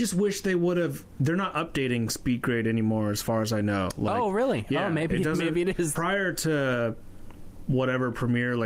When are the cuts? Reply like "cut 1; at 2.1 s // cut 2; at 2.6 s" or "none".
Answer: cut 1; at 6.0 s